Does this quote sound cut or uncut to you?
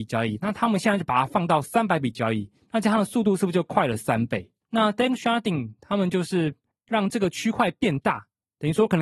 cut